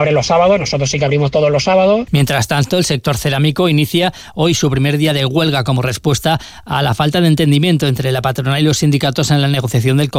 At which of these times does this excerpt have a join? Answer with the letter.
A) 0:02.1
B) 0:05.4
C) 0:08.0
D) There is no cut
A